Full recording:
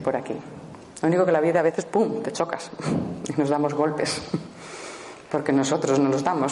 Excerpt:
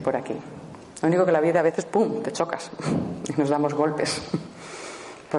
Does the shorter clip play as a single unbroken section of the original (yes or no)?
yes